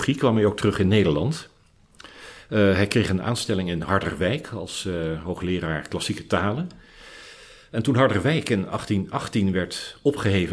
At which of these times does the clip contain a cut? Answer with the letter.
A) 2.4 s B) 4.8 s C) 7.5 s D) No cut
D